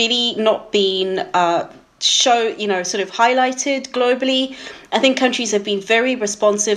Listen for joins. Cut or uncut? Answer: uncut